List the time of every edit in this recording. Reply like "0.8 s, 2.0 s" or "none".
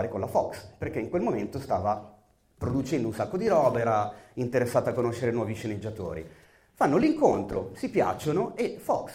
none